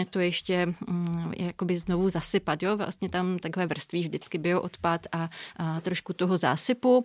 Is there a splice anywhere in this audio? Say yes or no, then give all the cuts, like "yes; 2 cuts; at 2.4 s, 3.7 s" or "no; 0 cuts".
no; 0 cuts